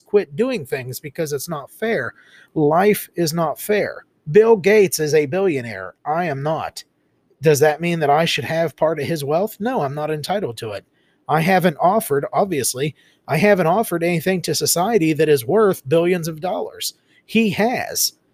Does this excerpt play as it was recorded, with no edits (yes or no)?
yes